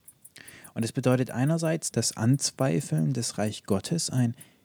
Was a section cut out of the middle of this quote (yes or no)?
yes